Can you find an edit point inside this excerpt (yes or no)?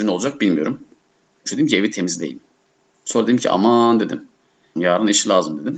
yes